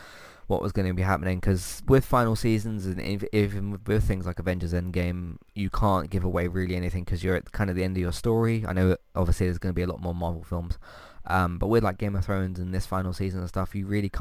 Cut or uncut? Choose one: uncut